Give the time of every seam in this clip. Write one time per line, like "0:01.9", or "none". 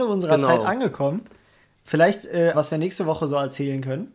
0:02.5